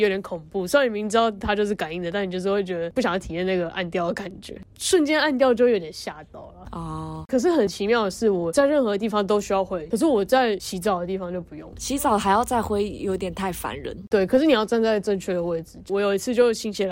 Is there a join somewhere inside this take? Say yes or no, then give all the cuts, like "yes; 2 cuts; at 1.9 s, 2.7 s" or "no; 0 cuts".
no; 0 cuts